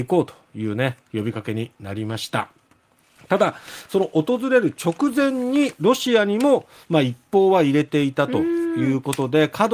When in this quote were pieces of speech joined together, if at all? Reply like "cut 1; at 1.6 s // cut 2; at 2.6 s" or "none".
none